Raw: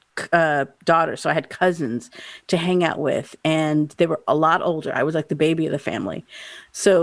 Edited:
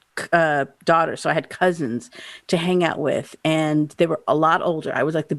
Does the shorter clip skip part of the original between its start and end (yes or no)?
no